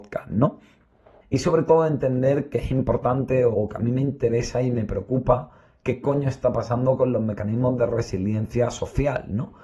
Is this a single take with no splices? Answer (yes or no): no